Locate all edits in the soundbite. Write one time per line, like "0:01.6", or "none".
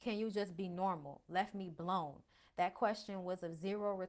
none